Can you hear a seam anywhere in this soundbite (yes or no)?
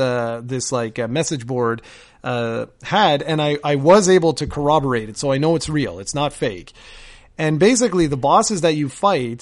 no